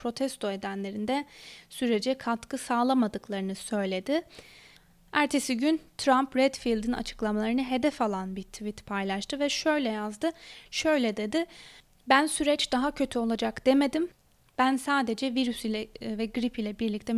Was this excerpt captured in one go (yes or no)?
no